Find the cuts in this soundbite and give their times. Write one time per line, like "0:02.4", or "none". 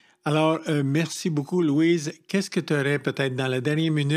none